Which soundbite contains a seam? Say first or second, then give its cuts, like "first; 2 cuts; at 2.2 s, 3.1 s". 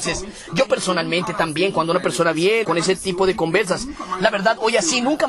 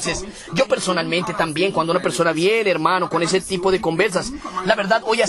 first; 1 cut; at 2.6 s